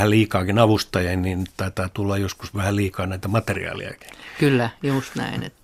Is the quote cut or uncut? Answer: uncut